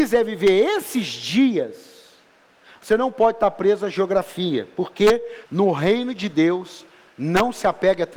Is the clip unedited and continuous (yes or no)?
no